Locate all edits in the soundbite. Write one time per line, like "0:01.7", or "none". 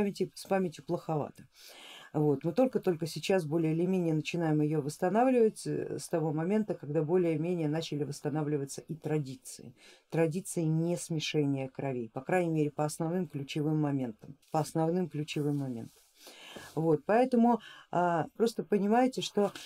0:14.4
0:18.4